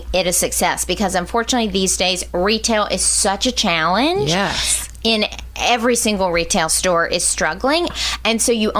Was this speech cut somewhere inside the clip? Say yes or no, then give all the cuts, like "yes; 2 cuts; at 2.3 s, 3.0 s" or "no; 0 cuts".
yes; 1 cut; at 7.9 s